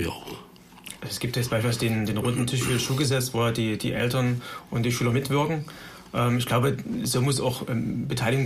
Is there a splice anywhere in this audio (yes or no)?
no